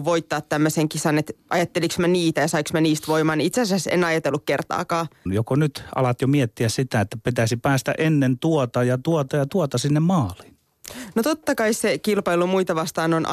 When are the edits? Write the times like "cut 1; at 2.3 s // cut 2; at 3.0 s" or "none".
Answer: cut 1; at 5.3 s